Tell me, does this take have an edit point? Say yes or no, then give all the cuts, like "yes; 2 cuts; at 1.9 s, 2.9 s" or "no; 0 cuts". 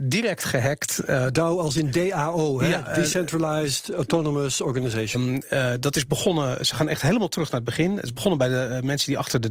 yes; 1 cut; at 5.1 s